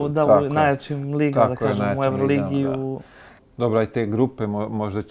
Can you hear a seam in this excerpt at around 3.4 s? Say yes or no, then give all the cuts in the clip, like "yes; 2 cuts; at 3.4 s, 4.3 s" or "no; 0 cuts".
yes; 1 cut; at 3.4 s